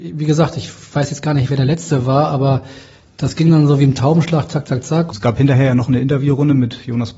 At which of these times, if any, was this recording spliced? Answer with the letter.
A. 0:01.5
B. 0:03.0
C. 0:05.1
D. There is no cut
C